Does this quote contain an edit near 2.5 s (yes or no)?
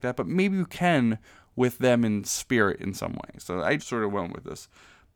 no